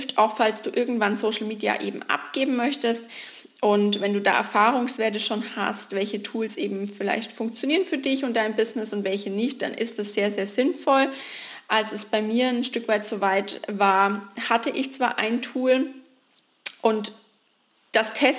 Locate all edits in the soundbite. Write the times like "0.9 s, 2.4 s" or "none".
none